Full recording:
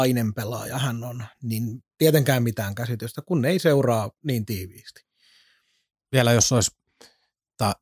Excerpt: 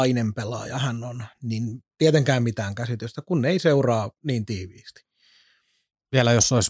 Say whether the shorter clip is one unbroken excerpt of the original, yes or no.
yes